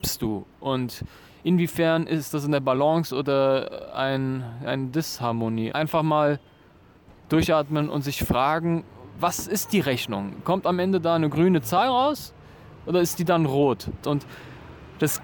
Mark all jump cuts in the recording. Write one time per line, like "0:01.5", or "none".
0:05.7
0:14.0

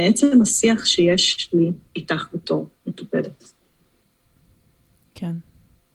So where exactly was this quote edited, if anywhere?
none

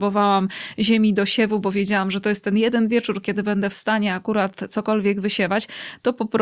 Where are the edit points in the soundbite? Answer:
none

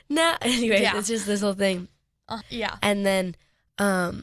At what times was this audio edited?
0:02.4

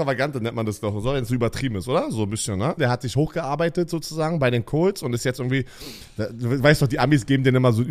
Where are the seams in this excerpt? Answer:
0:02.8

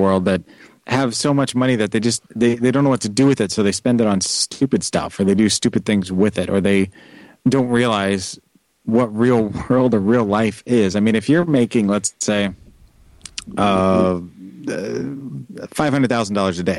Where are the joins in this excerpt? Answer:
0:02.3

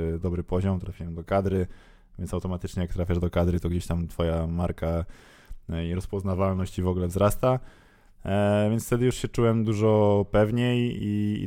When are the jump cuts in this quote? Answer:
none

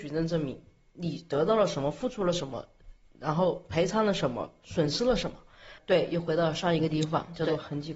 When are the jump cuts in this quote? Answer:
0:05.8

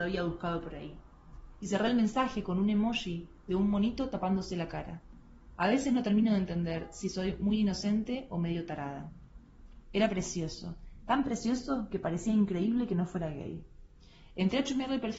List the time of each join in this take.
0:09.8

